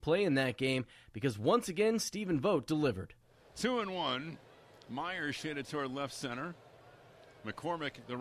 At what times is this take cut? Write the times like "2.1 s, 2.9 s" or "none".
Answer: none